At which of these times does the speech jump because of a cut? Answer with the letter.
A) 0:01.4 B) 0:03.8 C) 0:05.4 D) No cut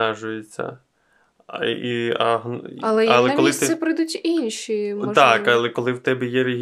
D